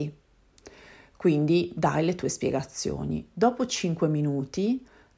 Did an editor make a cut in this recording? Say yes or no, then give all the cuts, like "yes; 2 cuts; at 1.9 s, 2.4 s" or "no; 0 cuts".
no; 0 cuts